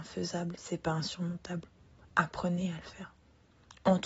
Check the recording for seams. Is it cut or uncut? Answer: uncut